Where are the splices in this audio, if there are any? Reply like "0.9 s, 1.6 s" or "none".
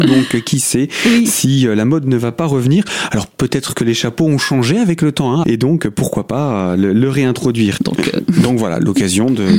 5.4 s, 7.8 s